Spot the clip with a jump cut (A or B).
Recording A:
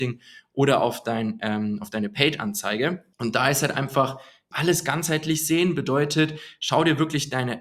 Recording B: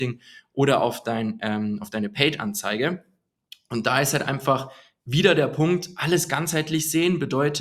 A